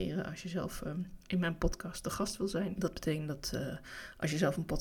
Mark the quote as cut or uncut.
cut